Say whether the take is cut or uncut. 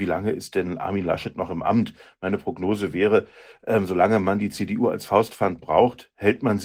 uncut